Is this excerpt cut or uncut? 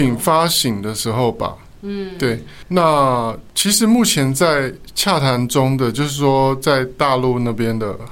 uncut